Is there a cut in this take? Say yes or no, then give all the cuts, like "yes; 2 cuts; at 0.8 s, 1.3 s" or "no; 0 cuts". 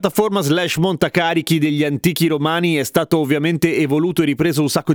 no; 0 cuts